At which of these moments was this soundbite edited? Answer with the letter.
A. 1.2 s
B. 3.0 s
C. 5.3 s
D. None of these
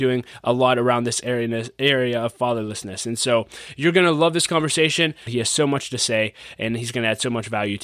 C